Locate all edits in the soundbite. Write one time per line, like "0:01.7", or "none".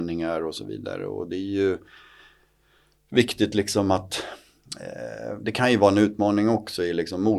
none